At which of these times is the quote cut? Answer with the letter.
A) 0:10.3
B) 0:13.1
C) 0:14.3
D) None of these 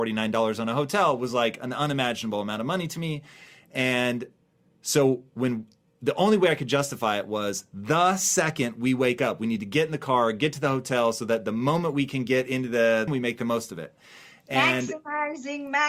B